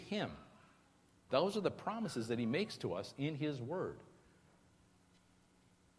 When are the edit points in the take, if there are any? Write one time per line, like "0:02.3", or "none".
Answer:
0:01.3